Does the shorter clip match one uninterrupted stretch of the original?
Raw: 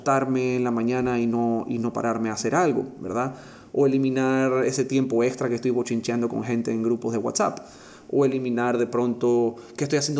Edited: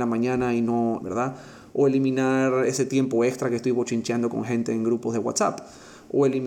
no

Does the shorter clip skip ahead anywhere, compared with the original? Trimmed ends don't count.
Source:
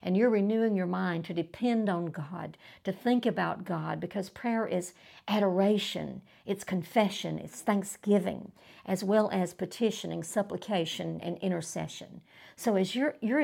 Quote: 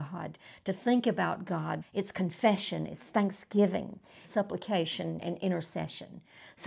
yes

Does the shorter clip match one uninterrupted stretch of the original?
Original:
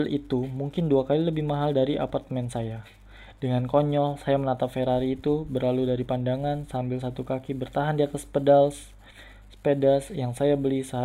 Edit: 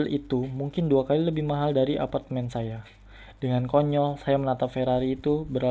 yes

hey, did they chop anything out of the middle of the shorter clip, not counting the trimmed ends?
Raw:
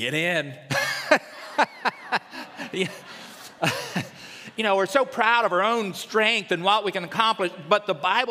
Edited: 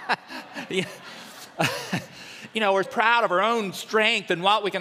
yes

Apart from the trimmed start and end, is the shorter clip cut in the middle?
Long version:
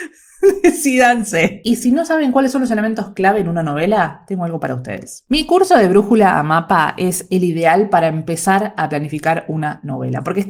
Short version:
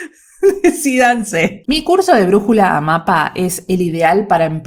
yes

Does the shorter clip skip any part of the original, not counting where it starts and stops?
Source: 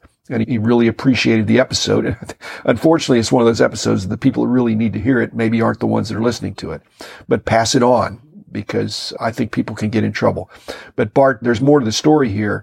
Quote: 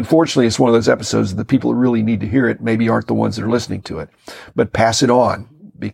no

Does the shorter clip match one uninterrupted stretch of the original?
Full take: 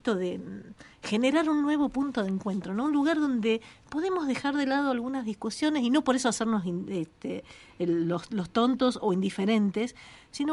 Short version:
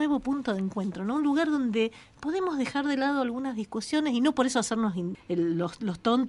no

